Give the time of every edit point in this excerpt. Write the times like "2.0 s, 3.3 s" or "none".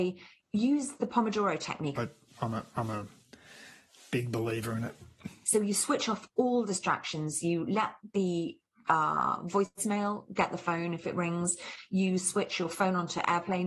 1.9 s, 5.4 s